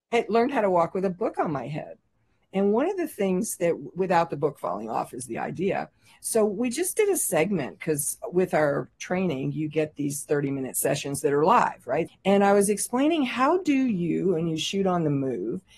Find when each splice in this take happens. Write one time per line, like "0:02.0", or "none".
0:12.1